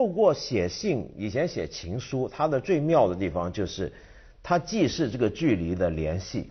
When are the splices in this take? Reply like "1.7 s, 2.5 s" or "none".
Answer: none